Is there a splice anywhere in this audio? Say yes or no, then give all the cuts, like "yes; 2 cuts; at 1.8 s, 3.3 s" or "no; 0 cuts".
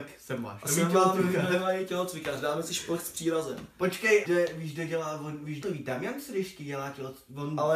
yes; 2 cuts; at 4.2 s, 5.6 s